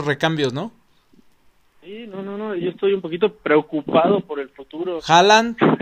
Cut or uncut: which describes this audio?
uncut